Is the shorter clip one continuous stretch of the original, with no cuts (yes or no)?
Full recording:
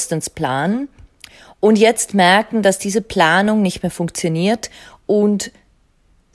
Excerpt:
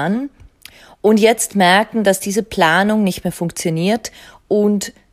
yes